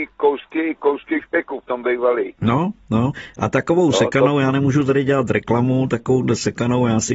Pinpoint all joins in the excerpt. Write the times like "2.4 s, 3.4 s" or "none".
none